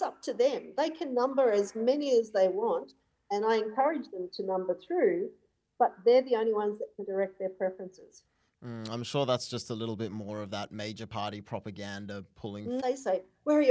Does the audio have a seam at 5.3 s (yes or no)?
no